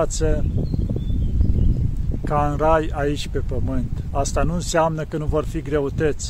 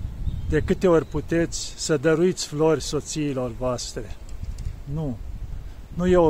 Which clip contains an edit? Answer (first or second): second